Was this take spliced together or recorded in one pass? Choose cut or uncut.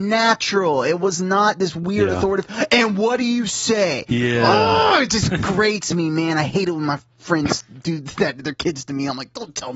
uncut